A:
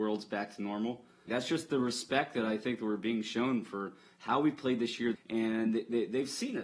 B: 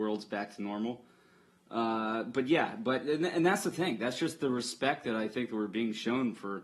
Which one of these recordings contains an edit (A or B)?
A